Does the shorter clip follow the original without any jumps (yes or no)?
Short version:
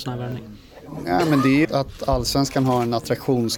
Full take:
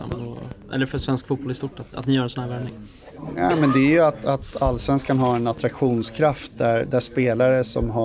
no